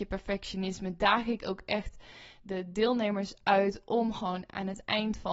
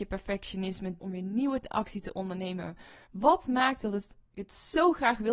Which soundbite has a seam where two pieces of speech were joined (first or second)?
second